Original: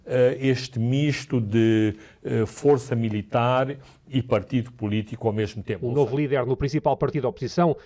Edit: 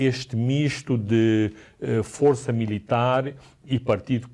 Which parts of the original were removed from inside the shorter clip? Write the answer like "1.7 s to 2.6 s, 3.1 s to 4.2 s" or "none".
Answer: none